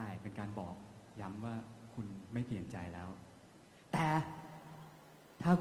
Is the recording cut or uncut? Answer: uncut